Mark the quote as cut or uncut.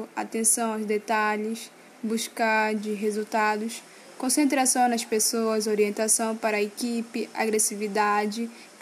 uncut